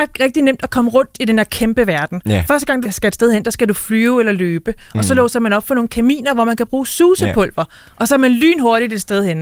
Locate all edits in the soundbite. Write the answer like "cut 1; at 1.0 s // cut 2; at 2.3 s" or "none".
cut 1; at 2.8 s